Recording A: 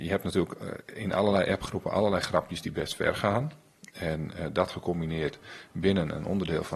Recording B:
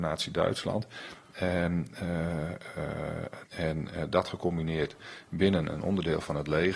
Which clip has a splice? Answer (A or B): B